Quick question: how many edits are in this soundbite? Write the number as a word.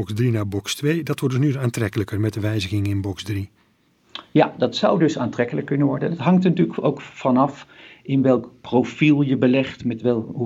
zero